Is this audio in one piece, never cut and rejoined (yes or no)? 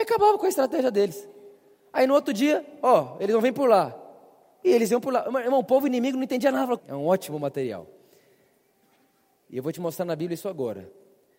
no